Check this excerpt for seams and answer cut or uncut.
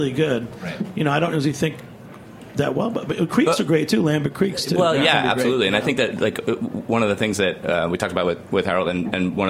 uncut